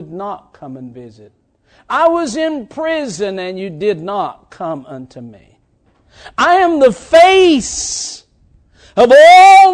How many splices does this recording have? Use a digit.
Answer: 0